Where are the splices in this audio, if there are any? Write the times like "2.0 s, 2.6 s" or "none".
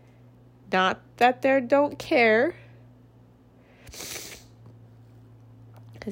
none